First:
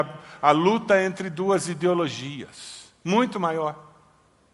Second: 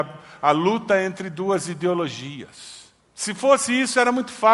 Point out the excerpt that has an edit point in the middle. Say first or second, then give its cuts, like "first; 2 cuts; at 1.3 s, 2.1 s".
second; 1 cut; at 3.0 s